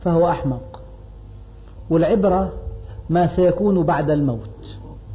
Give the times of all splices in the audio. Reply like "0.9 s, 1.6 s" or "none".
none